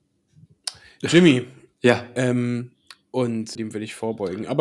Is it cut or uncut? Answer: cut